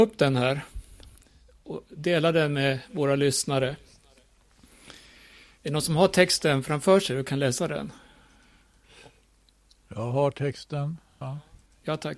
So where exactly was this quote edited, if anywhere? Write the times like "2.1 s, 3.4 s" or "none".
11.2 s